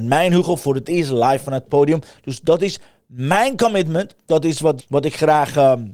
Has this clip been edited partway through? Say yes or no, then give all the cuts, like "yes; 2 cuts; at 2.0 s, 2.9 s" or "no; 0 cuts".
yes; 1 cut; at 4.8 s